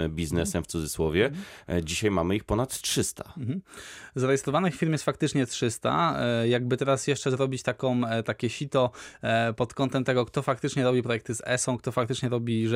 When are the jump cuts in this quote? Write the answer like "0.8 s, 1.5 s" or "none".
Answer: none

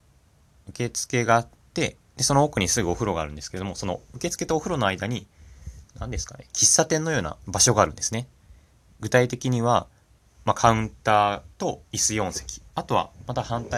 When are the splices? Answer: none

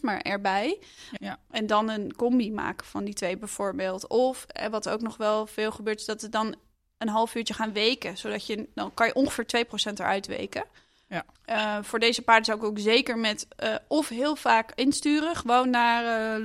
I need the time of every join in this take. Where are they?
1.2 s, 11.4 s

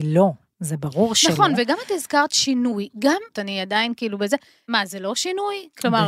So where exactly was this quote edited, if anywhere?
3.3 s, 4.7 s

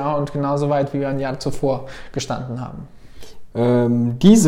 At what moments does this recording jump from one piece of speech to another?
3.5 s

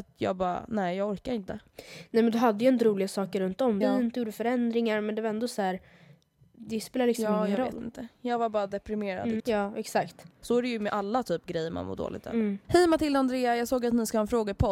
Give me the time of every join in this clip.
3.8 s, 9.4 s, 12.6 s

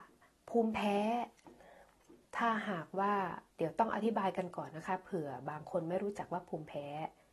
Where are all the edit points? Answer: 2.2 s, 3.5 s

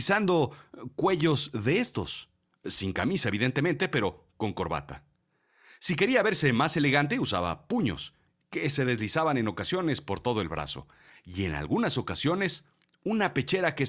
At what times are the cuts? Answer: none

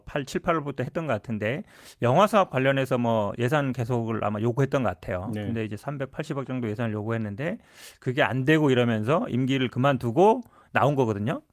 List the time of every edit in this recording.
none

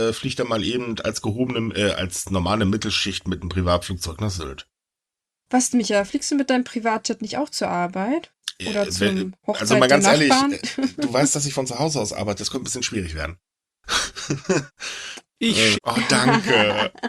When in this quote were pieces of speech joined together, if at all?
15.7 s

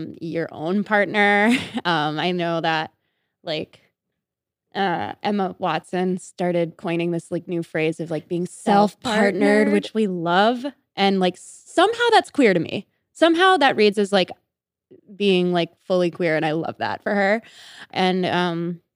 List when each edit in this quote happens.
17.9 s

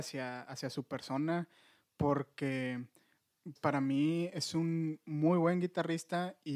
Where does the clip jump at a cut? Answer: 3.6 s

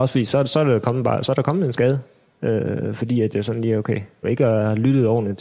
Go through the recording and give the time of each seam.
4.2 s

